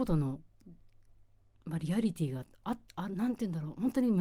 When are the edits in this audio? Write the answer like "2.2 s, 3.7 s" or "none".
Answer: none